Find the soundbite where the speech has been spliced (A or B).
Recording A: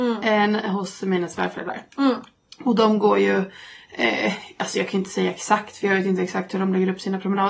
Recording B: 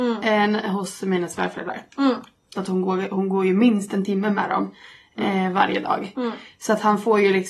B